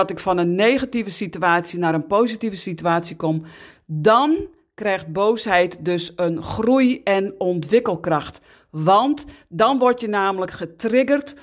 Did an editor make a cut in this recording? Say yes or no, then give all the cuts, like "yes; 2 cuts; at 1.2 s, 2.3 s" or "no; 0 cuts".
no; 0 cuts